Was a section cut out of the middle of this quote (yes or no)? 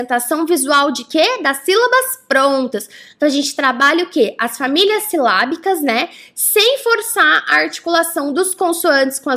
no